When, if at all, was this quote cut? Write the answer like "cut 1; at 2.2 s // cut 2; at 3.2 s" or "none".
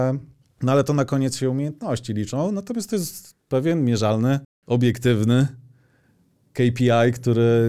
none